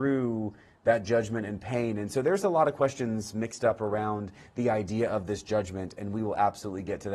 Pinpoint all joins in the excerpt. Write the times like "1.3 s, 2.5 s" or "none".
none